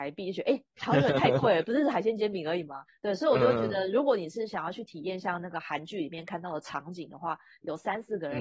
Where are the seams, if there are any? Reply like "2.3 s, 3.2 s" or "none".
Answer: 2.9 s